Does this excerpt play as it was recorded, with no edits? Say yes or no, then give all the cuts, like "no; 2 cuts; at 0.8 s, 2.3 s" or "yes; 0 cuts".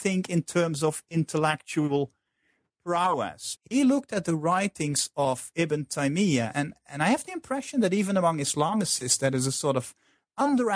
no; 2 cuts; at 3.6 s, 6.5 s